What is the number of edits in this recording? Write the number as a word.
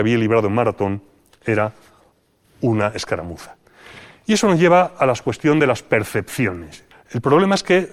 one